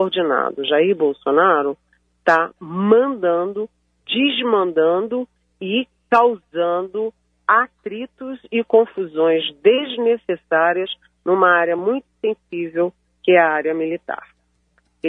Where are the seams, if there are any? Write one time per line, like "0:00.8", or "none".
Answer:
none